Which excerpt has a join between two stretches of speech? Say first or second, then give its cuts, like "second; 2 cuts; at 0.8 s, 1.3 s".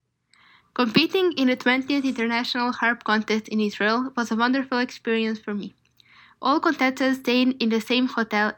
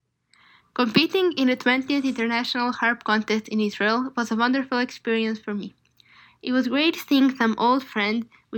second; 1 cut; at 6.3 s